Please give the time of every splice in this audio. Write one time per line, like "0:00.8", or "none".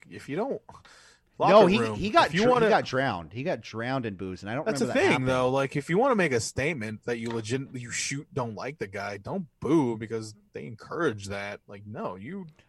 none